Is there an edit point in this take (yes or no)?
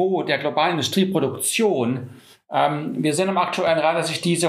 no